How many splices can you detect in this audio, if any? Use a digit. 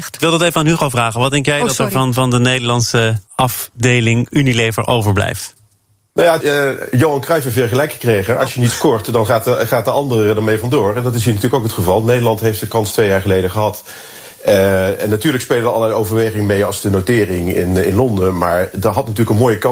2